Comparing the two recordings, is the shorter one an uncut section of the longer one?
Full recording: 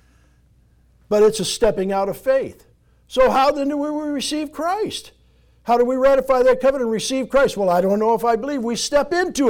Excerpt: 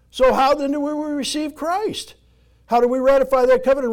yes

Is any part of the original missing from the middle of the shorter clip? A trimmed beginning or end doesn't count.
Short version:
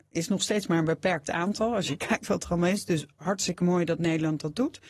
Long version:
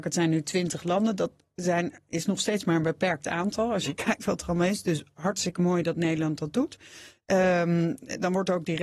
no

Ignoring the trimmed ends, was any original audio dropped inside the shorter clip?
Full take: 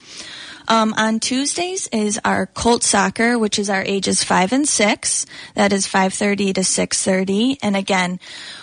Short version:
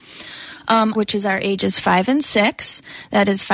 yes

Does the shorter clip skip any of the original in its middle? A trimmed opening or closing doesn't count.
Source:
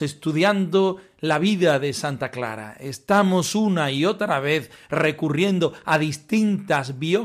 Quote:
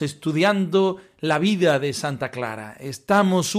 no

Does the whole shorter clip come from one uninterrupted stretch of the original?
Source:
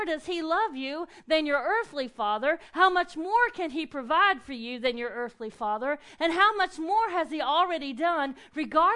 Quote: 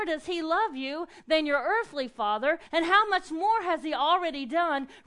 no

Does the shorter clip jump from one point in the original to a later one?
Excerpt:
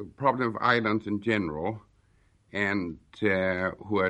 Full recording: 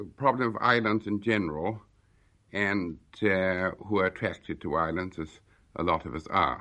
no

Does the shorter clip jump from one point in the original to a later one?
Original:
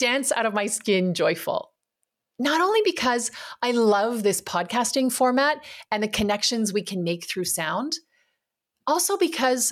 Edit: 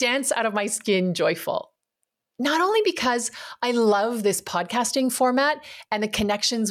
no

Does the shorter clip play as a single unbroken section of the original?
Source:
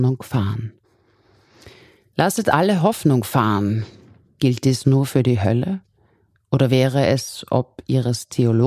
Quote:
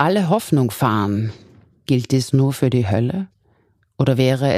yes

